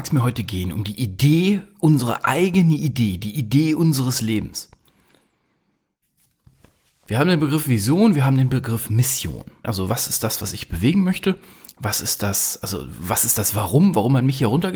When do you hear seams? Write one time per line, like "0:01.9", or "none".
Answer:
0:09.6